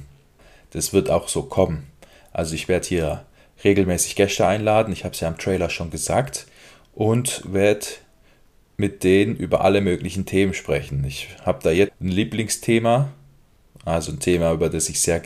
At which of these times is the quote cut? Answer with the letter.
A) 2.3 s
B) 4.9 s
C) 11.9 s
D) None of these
C